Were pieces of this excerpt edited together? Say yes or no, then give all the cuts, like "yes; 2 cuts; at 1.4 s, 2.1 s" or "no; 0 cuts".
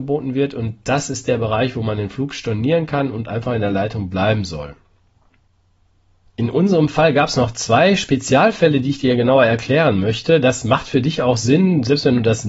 no; 0 cuts